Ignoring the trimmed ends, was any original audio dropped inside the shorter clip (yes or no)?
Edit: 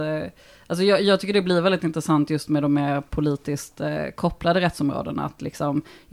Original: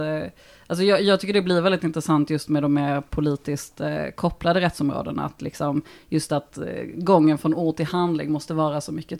no